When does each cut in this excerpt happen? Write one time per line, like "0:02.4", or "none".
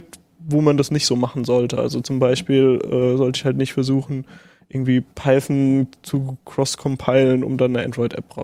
none